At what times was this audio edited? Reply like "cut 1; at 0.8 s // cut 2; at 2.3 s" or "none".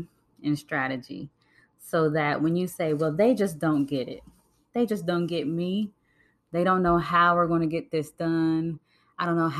none